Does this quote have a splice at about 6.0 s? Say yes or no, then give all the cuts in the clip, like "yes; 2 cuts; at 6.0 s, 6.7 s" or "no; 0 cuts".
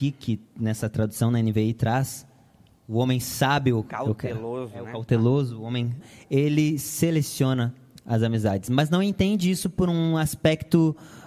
yes; 1 cut; at 6.0 s